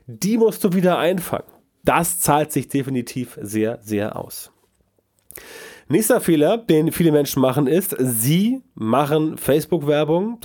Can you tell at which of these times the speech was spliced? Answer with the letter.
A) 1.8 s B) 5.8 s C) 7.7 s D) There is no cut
A